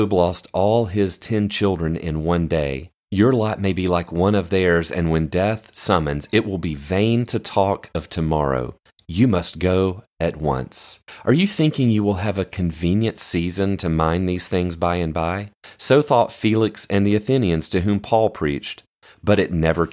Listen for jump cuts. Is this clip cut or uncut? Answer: uncut